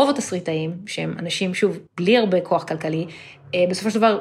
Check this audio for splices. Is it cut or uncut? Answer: cut